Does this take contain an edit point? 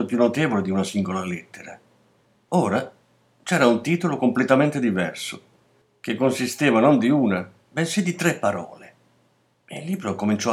no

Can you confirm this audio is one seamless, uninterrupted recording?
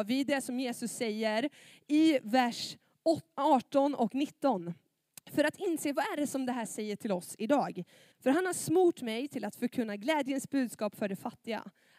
no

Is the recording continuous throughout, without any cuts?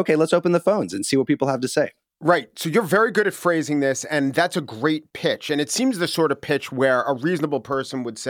yes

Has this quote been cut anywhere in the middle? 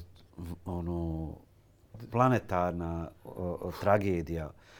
no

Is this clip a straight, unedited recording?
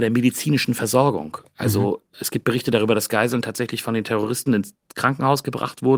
yes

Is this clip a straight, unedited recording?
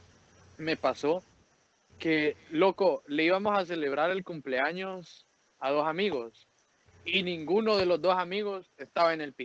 yes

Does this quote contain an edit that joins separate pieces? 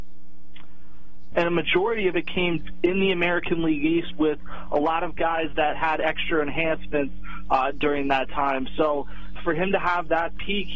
yes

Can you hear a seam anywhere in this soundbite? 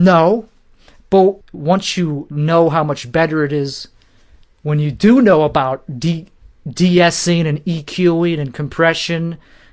yes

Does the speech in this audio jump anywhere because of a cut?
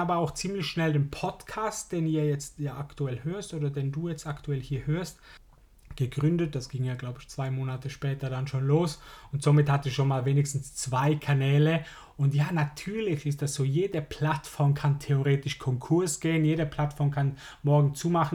no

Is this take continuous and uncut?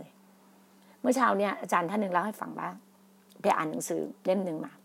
yes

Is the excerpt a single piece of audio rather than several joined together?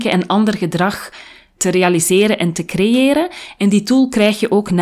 no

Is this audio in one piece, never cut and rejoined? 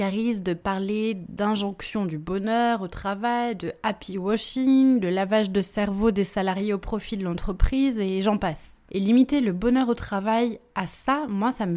no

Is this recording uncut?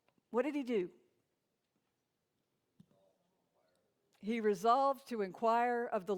yes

